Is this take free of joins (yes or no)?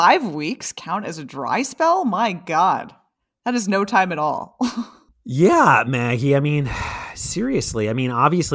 yes